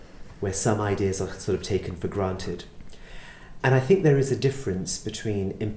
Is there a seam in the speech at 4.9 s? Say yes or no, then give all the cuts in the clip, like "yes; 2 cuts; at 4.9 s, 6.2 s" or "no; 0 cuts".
no; 1 cut; at 3.6 s